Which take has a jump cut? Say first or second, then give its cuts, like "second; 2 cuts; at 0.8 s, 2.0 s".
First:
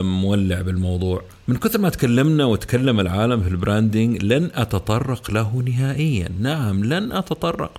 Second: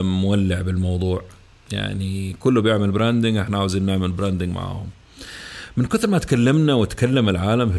first; 1 cut; at 1.4 s